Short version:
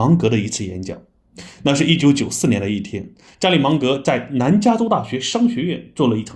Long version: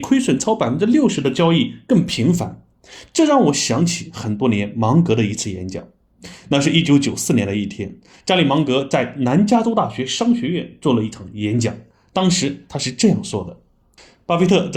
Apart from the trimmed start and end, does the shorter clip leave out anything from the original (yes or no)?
no